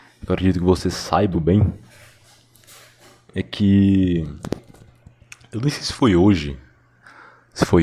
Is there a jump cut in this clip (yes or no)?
yes